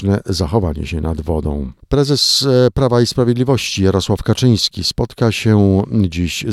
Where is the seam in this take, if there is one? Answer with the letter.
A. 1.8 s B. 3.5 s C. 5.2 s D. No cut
A